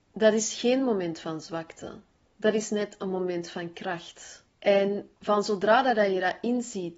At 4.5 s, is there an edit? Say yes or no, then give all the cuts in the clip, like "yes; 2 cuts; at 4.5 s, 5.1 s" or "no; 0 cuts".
yes; 1 cut; at 4.5 s